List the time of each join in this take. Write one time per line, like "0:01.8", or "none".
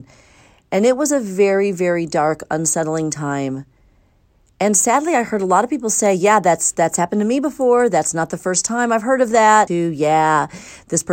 0:09.7